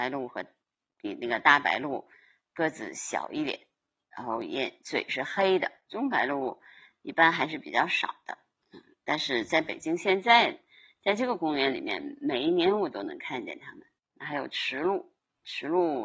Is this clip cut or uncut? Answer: uncut